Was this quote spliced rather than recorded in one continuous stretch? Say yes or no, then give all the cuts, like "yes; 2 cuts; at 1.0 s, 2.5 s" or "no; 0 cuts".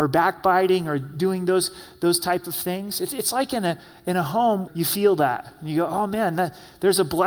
yes; 1 cut; at 4.7 s